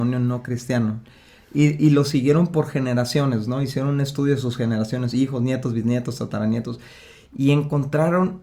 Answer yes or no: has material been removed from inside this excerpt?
no